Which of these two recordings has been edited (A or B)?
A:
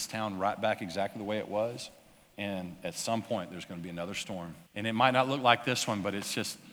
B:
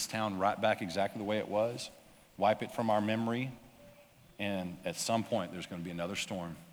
A